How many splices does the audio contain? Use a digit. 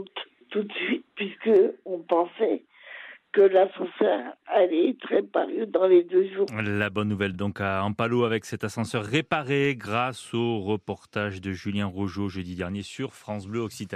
0